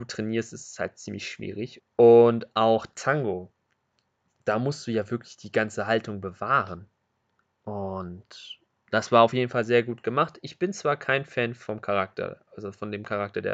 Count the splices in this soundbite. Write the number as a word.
one